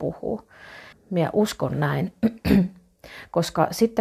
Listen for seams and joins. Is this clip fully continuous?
no; 1 cut; at 0.9 s

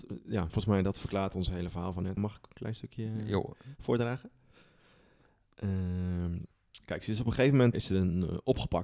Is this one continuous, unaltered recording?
no; 2 cuts; at 2.2 s, 7.7 s

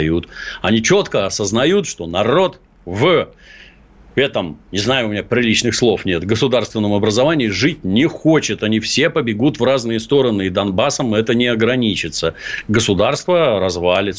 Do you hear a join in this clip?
no; 0 cuts

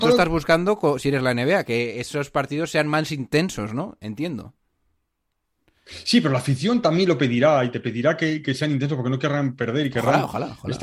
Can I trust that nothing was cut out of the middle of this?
yes; 0 cuts

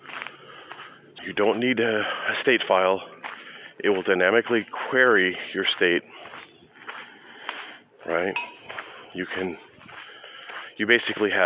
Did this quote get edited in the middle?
yes; 1 cut; at 1.2 s

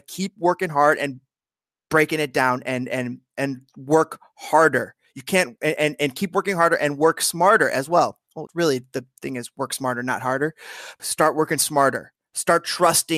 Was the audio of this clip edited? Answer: yes; 2 cuts; at 8.5 s, 11.0 s

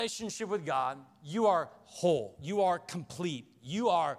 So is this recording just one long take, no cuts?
yes; 0 cuts

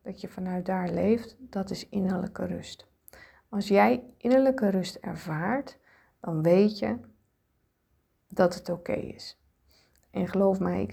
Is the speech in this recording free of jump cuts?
no; 1 cut; at 10.0 s

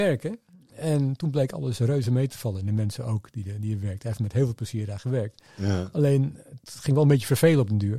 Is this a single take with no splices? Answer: yes; 0 cuts

